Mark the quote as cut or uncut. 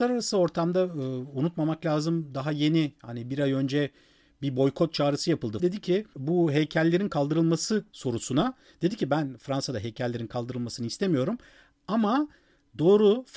cut